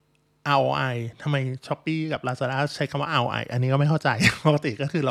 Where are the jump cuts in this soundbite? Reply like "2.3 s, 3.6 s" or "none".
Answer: none

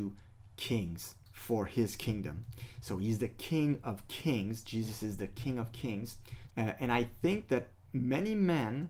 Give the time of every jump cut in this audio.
6.5 s

